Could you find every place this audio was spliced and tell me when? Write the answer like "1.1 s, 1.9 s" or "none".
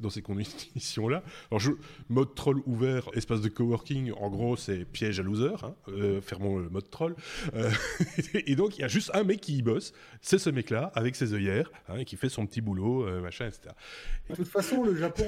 3.1 s, 14.3 s